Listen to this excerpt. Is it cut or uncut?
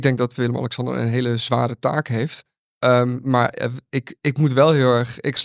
uncut